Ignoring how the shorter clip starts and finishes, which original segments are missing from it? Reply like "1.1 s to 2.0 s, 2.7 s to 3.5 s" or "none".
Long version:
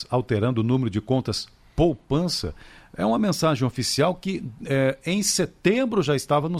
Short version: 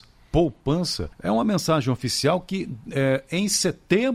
2.6 s to 2.9 s